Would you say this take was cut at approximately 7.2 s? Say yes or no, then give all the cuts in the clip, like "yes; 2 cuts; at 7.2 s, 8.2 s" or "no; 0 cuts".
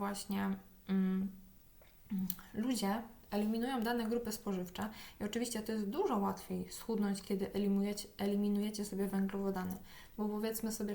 no; 0 cuts